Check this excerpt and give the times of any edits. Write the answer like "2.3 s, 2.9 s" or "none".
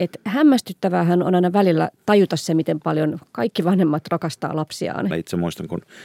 5.1 s